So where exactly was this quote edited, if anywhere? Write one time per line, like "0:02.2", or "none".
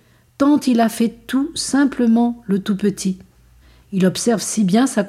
0:03.8